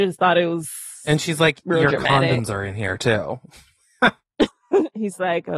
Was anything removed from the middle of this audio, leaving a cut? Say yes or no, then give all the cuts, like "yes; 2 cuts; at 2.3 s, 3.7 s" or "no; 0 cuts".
no; 0 cuts